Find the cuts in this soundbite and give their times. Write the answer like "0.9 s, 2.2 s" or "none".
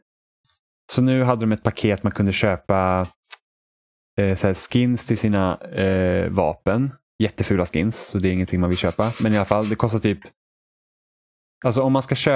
none